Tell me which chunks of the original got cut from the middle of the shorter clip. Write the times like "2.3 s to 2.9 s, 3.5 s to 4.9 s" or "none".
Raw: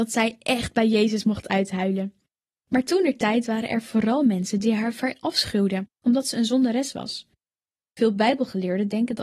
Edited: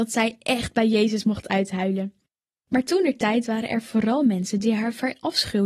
none